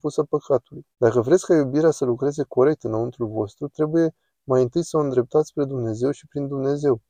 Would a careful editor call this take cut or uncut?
cut